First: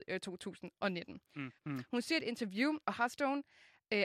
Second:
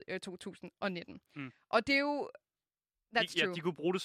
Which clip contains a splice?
first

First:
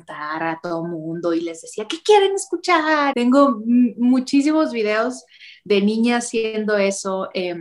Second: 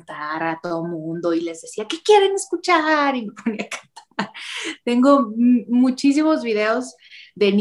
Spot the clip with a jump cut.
first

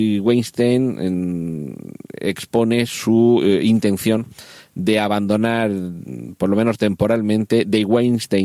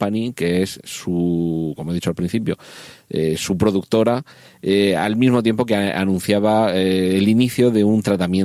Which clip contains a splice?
second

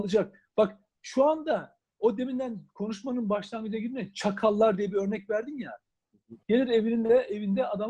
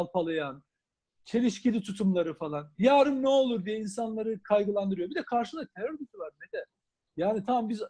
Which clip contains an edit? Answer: first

